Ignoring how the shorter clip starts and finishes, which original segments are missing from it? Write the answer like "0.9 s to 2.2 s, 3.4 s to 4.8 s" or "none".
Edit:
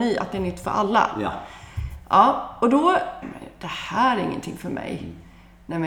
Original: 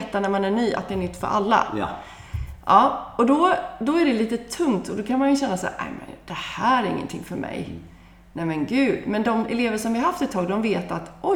3.8 s to 5.9 s